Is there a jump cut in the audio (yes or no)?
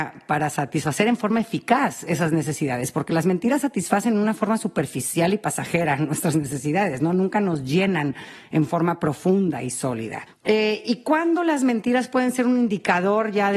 no